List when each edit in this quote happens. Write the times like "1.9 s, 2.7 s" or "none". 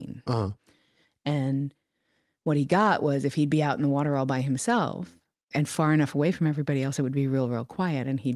5.5 s